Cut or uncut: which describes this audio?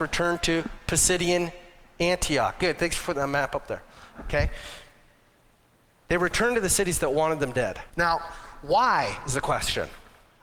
cut